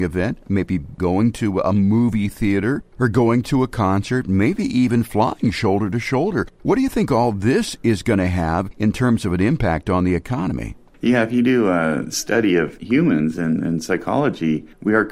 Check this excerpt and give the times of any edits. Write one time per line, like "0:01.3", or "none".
none